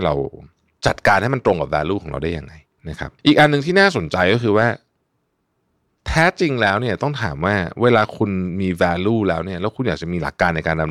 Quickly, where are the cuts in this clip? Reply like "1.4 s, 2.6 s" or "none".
3.2 s